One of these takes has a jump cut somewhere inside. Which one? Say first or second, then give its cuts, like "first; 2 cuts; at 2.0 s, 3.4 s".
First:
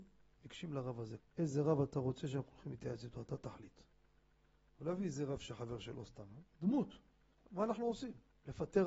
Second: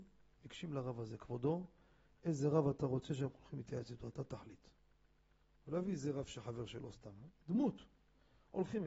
first; 2 cuts; at 1.2 s, 7.3 s